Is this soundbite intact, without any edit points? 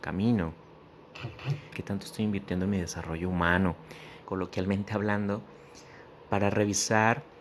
no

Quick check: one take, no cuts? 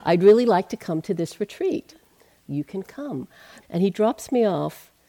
no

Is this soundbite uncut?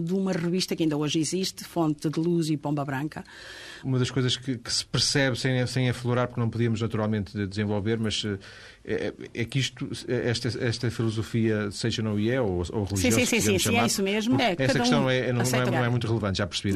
no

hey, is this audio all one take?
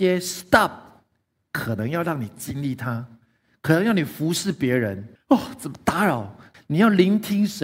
no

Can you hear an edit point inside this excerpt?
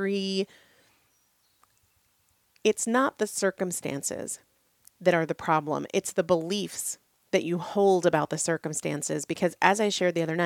no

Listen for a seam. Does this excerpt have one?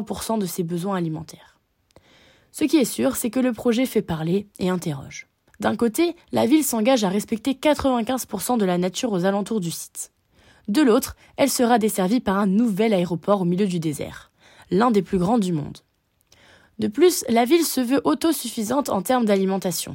yes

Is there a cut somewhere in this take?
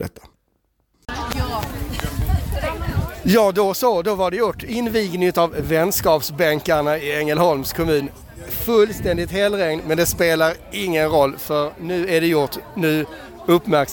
no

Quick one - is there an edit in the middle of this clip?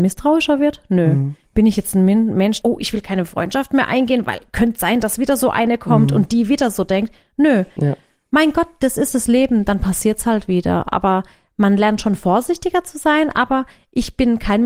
yes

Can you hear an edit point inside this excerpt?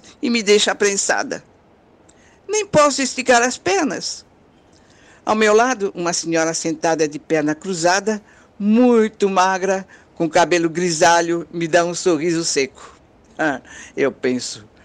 no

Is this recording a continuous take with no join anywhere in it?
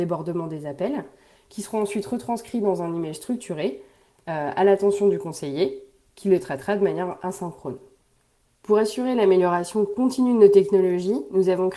yes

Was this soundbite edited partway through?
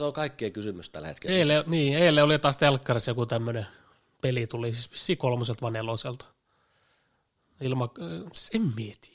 no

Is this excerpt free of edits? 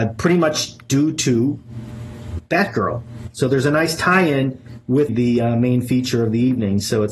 no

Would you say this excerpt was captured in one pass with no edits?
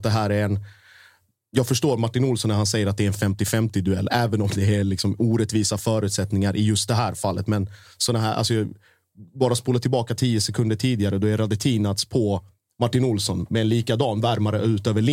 yes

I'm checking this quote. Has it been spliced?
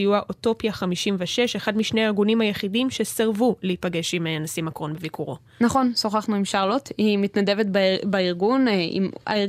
no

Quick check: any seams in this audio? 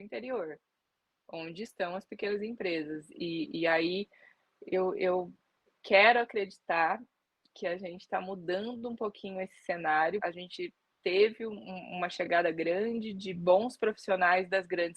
yes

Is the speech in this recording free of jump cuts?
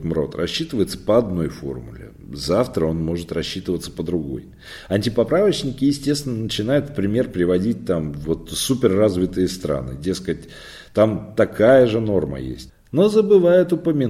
no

